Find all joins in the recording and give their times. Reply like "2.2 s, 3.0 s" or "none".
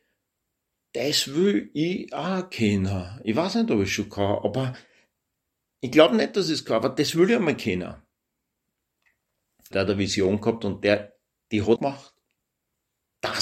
9.7 s, 11.8 s

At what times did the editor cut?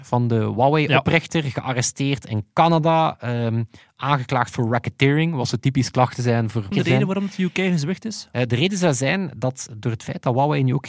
6.7 s

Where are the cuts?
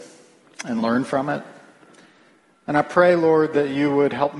none

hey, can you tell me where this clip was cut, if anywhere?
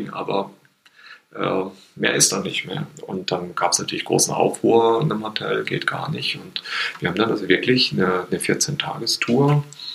none

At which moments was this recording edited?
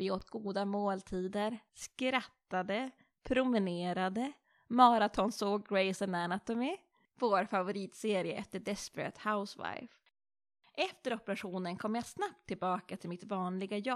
1.7 s

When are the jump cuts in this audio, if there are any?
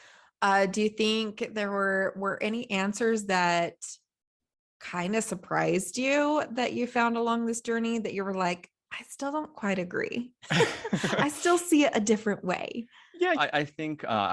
13.3 s

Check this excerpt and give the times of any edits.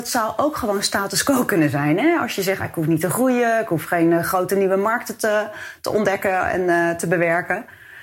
2.6 s

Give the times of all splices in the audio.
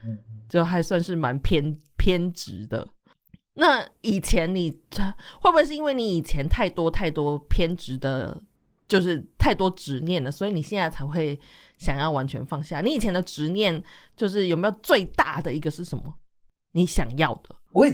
none

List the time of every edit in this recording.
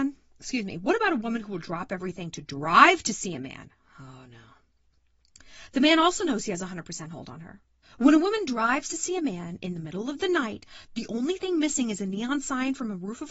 7.8 s

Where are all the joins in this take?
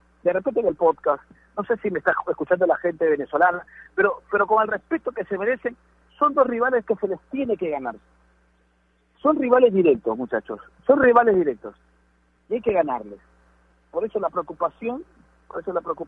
none

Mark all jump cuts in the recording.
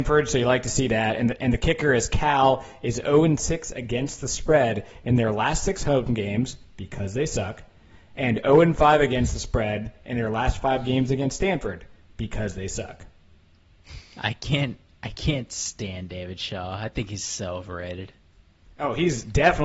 none

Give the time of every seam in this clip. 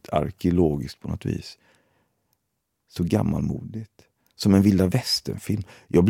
none

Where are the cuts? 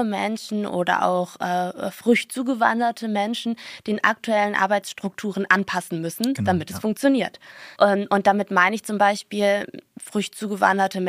7.8 s

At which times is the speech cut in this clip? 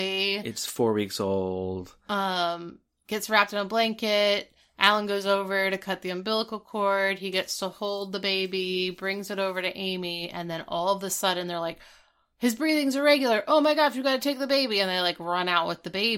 none

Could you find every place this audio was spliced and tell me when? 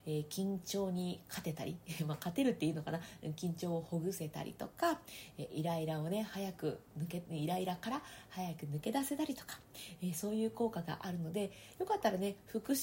none

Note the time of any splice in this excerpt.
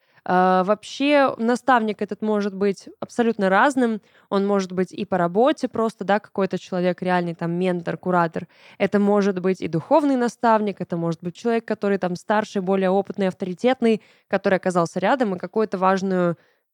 11.4 s

